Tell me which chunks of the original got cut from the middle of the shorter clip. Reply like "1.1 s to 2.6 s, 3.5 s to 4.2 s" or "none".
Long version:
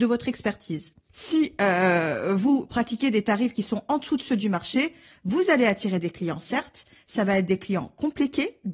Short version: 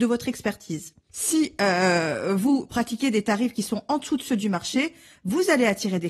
none